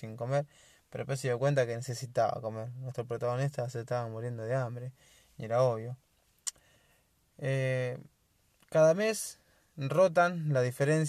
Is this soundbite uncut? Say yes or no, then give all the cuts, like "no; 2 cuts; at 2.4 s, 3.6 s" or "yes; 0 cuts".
yes; 0 cuts